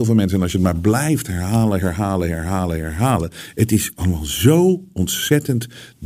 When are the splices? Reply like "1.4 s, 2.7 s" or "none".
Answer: none